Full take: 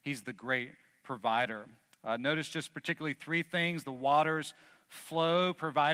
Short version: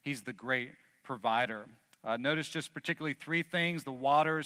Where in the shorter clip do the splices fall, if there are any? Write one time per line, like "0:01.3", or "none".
none